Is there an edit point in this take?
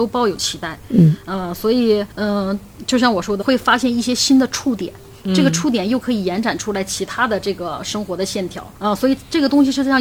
yes; 3 cuts; at 2.1 s, 3.4 s, 8.8 s

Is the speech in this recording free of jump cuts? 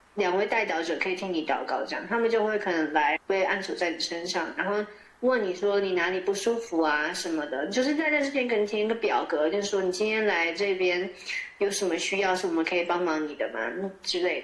no; 1 cut; at 3.2 s

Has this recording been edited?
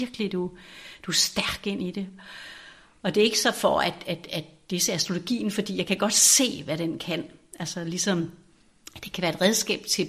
no; 0 cuts

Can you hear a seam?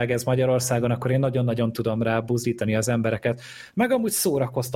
no; 0 cuts

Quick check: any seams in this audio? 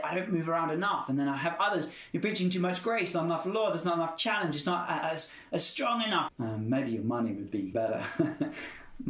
yes; 2 cuts; at 6.3 s, 7.7 s

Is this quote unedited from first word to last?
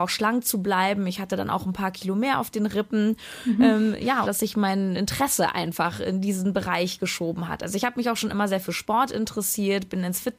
no; 1 cut; at 4.2 s

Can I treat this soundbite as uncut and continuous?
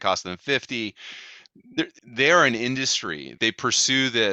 no; 2 cuts; at 2.0 s, 3.4 s

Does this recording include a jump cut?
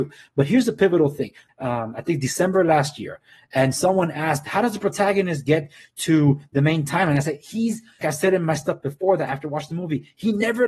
yes; 2 cuts; at 1.5 s, 8.0 s

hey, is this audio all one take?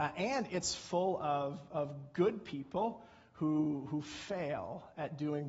yes; 0 cuts

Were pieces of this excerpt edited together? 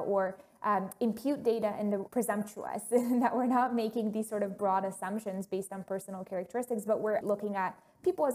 yes; 2 cuts; at 2.1 s, 7.2 s

